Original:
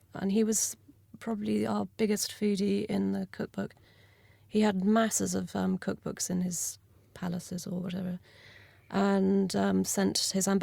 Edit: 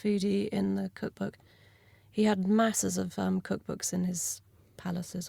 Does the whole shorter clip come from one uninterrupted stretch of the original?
yes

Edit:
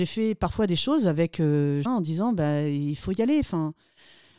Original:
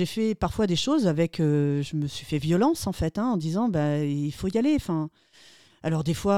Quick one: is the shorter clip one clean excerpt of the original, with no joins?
no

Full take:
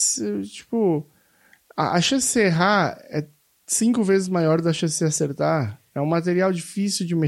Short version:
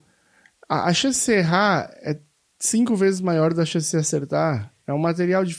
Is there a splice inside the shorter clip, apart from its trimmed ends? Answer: no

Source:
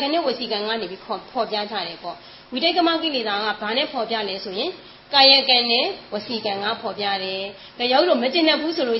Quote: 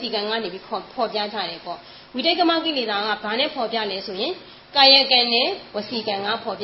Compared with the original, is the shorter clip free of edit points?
yes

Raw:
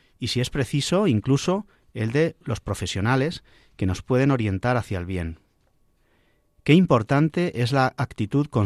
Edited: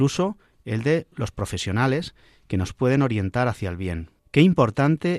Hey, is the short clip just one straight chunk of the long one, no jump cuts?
no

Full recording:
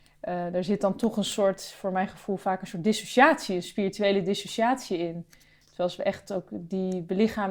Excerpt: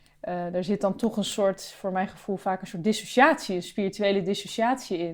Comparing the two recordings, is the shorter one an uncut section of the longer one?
yes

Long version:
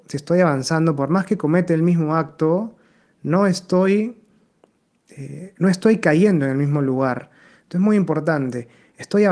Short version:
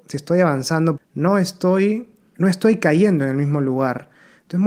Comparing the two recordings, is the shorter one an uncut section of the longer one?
no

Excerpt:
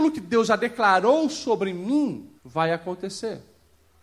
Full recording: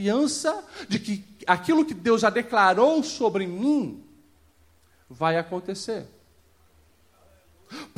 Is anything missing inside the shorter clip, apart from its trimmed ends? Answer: yes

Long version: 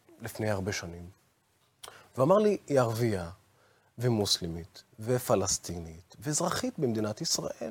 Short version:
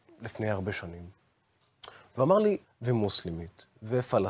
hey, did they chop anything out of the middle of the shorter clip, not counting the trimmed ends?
yes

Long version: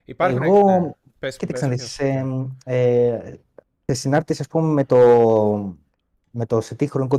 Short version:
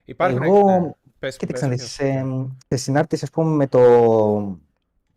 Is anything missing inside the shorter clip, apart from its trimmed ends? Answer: yes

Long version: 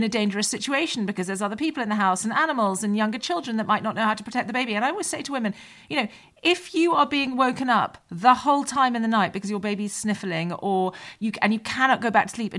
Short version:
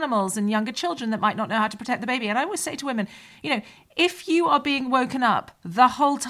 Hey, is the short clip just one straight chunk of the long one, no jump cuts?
yes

